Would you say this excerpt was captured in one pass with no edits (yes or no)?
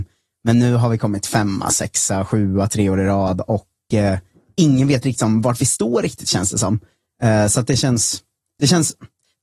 yes